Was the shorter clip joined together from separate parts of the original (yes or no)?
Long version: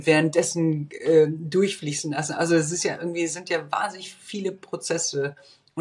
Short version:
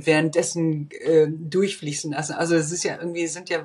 no